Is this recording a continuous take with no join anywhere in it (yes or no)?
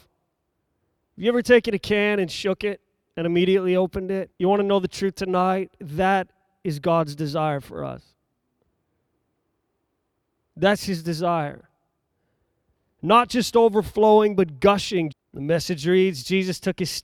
no